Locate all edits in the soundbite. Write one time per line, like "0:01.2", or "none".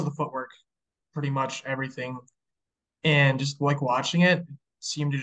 none